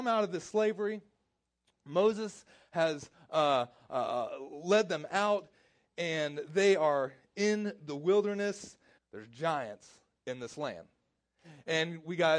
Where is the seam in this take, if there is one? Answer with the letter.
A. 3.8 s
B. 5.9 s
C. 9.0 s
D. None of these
C